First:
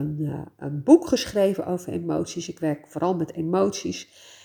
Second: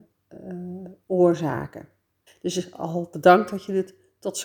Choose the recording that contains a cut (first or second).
second